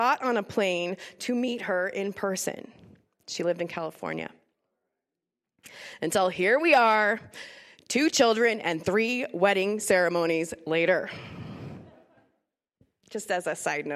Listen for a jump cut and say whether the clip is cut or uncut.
uncut